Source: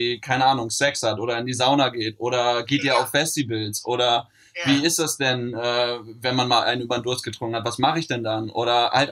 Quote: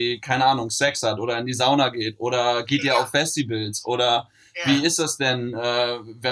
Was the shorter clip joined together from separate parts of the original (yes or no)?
no